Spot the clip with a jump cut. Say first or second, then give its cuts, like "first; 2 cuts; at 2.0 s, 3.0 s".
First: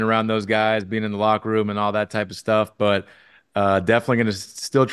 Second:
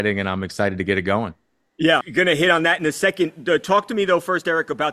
second; 1 cut; at 2.0 s